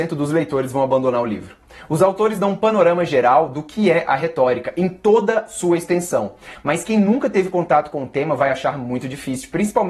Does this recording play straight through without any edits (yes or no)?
yes